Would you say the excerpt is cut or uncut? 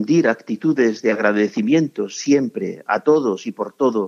uncut